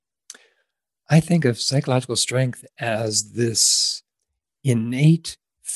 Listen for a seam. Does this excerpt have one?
no; 0 cuts

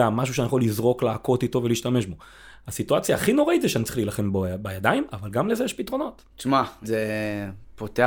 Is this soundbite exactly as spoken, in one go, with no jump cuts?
no; 1 cut; at 6.8 s

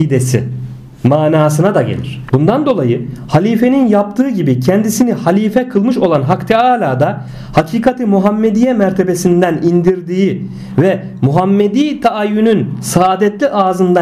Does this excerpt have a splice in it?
yes; 1 cut; at 2.3 s

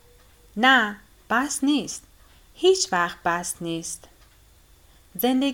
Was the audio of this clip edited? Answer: no; 0 cuts

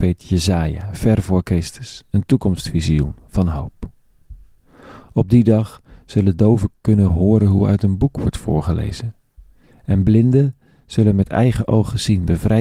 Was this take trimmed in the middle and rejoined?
no; 0 cuts

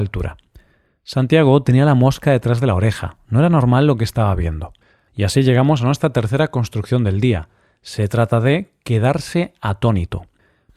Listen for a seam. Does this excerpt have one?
yes; 1 cut; at 5.1 s

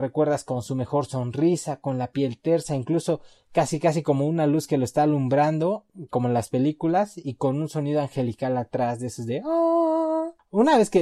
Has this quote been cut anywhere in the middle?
no; 0 cuts

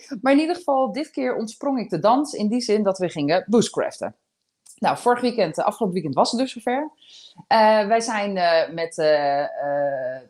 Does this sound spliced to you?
no; 0 cuts

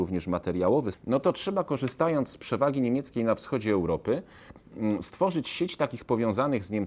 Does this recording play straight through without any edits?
no; 1 cut; at 0.9 s

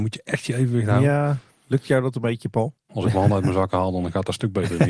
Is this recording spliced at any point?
yes; 1 cut; at 2.9 s

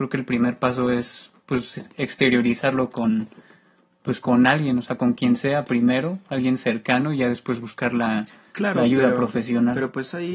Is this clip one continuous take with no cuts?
yes; 0 cuts

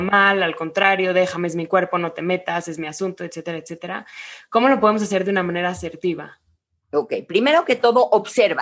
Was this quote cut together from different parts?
no; 0 cuts

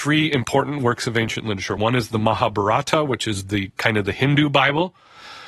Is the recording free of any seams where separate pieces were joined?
yes; 0 cuts

